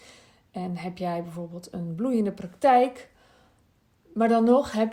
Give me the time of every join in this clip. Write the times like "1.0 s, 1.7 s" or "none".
none